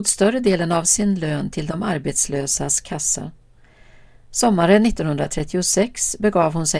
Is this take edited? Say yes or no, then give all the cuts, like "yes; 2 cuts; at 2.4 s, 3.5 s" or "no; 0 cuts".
no; 0 cuts